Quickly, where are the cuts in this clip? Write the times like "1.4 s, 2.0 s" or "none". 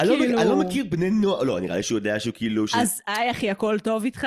none